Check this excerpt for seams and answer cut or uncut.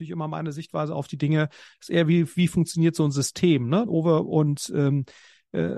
cut